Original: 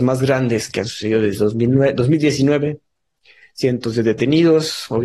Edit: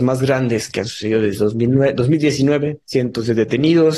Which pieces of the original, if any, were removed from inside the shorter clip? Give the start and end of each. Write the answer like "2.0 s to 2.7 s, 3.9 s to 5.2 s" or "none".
2.8 s to 3.5 s